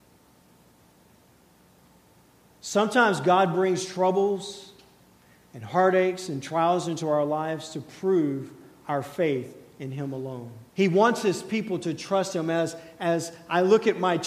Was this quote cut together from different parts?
yes; 1 cut; at 10.7 s

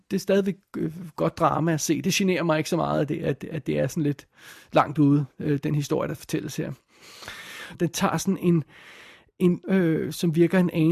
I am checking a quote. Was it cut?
yes; 2 cuts; at 7.8 s, 9.6 s

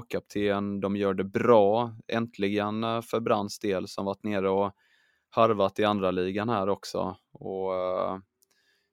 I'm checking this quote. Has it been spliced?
no; 0 cuts

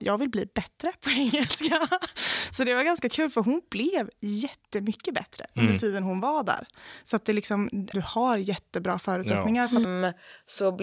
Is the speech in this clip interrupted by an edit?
yes; 2 cuts; at 7.9 s, 9.8 s

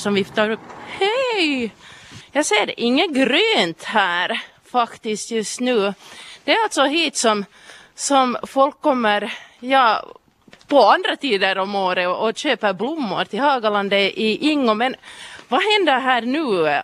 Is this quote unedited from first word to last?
no; 1 cut; at 2.2 s

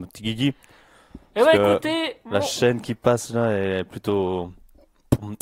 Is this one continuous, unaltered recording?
yes; 0 cuts

